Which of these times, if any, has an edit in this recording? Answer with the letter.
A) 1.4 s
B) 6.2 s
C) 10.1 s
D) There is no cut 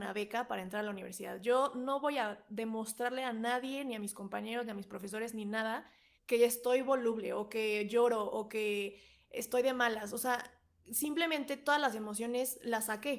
B